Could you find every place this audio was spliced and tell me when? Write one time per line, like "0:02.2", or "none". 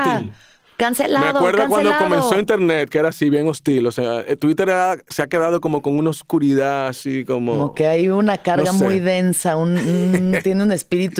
none

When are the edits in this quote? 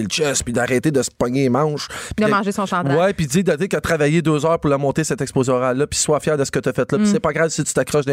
none

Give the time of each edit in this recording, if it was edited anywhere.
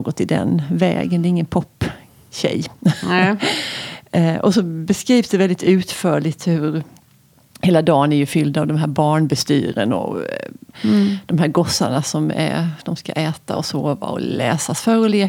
none

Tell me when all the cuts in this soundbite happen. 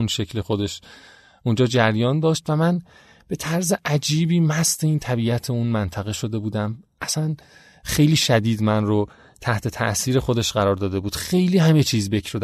none

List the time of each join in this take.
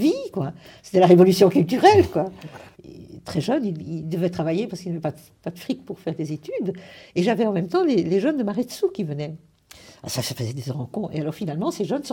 0:02.7

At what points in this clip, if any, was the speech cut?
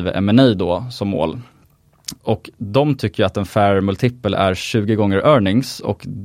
0:02.2

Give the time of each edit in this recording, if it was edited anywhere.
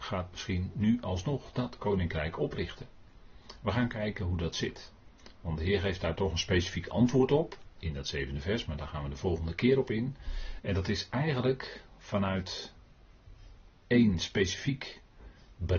0:10.6

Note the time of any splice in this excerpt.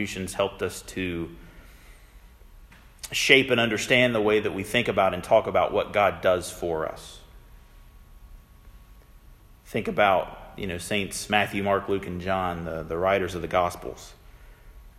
none

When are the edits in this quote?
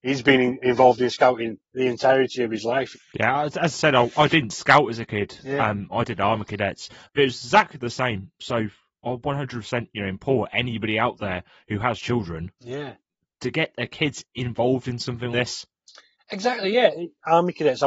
0:02.9
0:15.3

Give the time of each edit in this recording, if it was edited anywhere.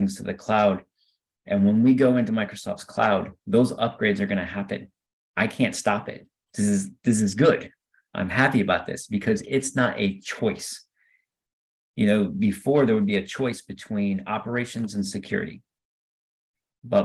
none

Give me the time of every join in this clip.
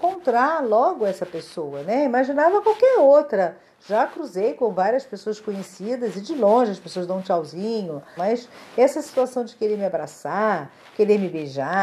0:08.2

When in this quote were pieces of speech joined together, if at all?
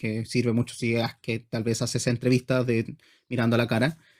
none

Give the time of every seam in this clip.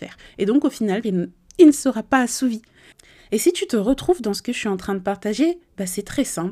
0:01.0
0:03.2

